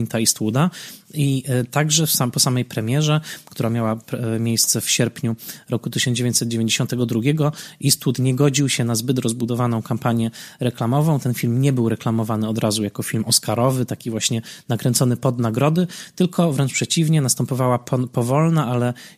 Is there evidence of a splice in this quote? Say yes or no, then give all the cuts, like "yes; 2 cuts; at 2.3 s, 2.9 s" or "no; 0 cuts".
no; 0 cuts